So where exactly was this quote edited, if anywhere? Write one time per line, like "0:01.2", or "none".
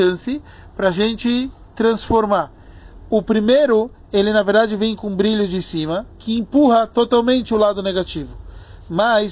none